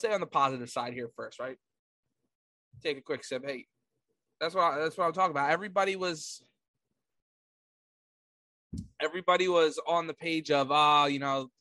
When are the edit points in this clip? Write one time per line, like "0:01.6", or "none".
none